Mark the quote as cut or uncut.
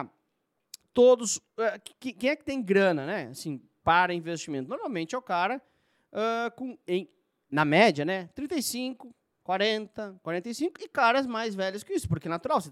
uncut